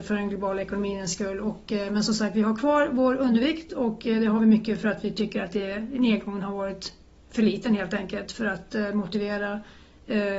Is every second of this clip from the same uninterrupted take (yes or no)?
yes